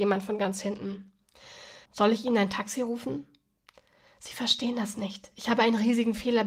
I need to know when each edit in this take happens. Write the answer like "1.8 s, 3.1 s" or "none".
1.9 s